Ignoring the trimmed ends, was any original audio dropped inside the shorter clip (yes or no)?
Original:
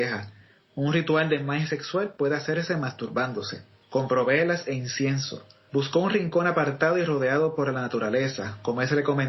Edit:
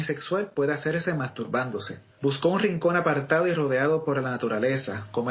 yes